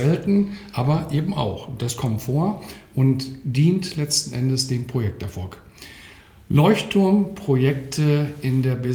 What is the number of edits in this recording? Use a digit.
0